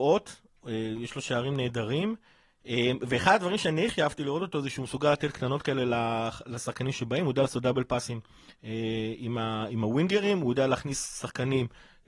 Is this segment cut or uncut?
uncut